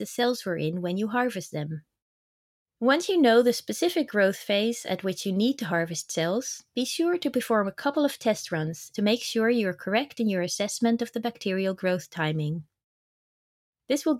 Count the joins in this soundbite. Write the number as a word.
two